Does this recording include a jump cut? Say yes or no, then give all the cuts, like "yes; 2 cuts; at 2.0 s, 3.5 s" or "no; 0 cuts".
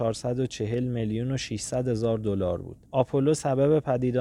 yes; 1 cut; at 2.9 s